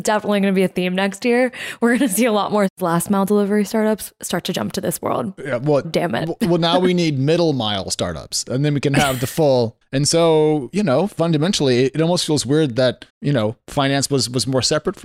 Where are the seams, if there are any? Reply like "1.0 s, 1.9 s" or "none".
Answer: 5.8 s, 9.8 s, 13.1 s